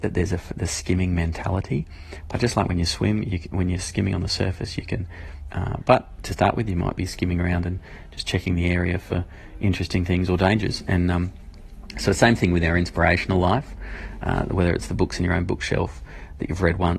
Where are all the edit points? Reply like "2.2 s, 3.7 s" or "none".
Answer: 5.5 s